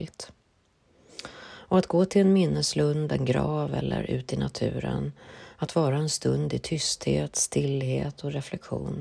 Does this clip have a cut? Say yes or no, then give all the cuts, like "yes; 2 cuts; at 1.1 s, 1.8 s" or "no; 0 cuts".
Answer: no; 0 cuts